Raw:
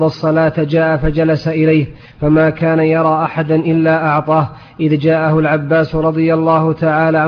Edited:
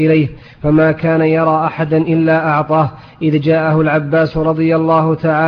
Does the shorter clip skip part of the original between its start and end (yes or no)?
no